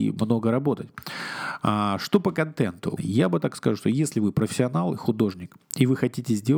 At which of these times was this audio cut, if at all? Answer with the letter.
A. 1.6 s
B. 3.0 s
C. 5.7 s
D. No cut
B